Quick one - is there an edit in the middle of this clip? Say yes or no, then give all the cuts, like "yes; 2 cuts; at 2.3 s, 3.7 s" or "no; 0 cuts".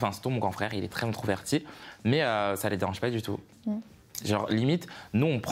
yes; 1 cut; at 4.2 s